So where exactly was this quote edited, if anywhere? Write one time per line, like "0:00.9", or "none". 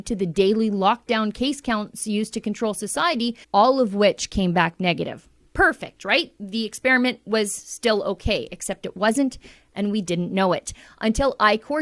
0:03.4